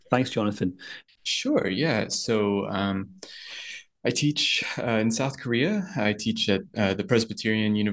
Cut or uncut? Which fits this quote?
cut